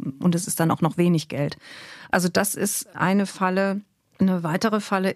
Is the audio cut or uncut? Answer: uncut